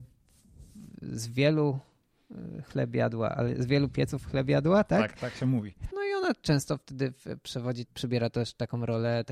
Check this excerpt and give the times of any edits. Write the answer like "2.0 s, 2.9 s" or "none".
5.9 s, 7.9 s